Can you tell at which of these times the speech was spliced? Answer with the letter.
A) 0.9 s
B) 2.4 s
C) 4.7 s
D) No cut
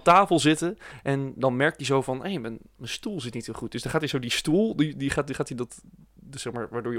D